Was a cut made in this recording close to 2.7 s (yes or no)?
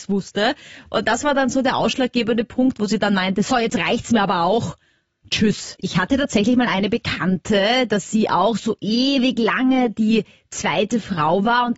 no